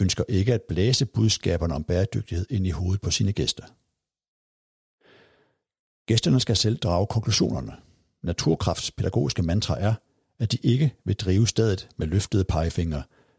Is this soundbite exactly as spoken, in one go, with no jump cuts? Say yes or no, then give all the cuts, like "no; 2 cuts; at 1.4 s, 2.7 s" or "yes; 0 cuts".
yes; 0 cuts